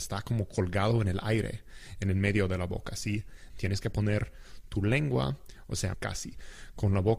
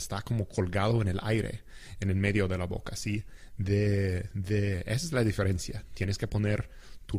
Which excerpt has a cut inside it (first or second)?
first